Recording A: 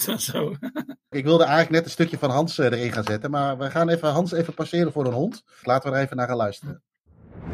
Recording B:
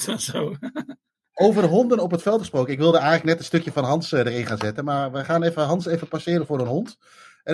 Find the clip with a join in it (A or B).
A